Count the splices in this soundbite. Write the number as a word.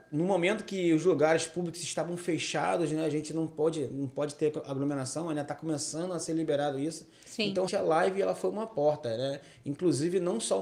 one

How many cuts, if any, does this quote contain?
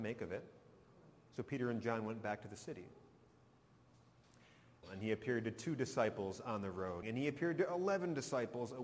two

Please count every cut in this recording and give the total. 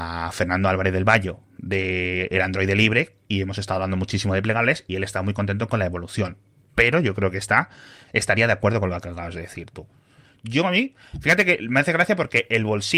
zero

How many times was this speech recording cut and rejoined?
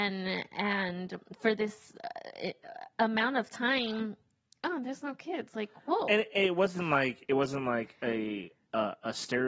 zero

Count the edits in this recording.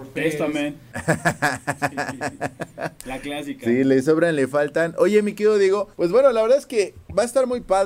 two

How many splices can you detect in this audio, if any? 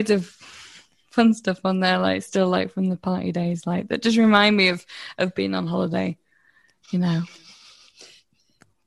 zero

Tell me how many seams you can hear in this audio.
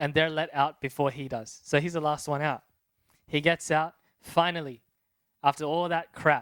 zero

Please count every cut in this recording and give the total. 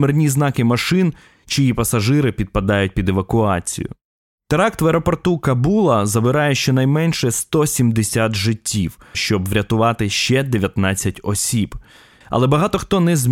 two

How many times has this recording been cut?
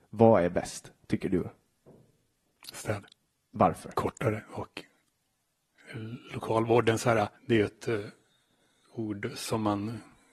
one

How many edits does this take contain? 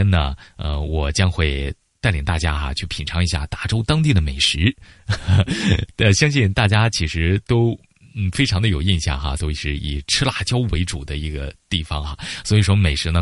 one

